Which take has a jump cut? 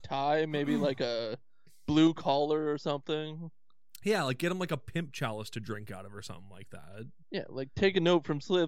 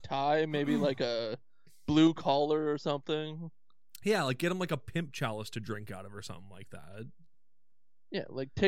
first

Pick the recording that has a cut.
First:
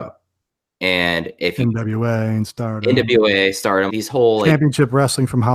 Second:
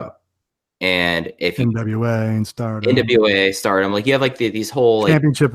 first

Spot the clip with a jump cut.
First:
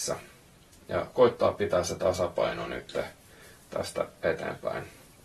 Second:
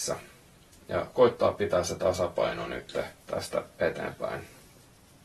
second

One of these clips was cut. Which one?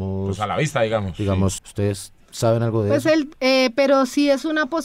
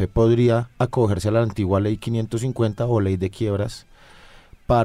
first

